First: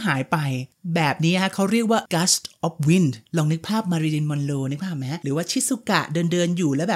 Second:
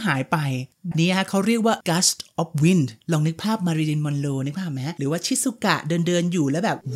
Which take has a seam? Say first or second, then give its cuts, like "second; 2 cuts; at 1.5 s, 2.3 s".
second; 1 cut; at 0.9 s